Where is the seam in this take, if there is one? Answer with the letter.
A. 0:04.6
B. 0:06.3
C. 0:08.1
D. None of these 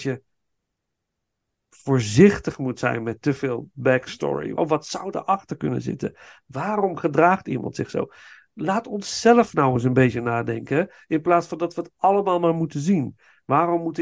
A